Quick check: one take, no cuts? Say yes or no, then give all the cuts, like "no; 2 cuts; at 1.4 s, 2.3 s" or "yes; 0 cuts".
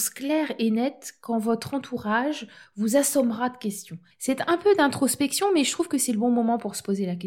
no; 1 cut; at 4.1 s